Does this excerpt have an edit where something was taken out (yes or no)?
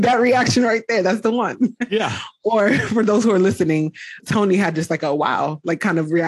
yes